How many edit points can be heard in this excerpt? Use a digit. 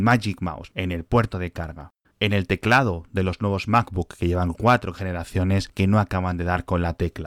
1